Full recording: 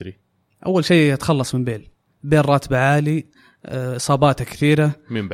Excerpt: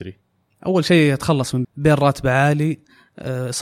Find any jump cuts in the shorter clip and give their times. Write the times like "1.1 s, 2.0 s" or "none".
1.6 s